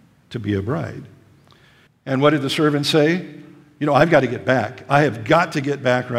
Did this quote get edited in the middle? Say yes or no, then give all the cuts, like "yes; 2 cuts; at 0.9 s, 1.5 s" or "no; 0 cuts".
yes; 1 cut; at 1.9 s